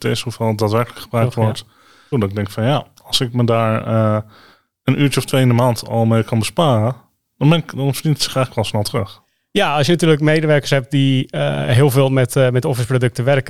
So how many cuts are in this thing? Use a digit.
1